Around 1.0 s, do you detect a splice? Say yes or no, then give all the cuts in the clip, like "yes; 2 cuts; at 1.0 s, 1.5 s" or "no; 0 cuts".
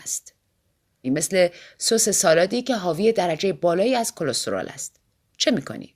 yes; 1 cut; at 1.0 s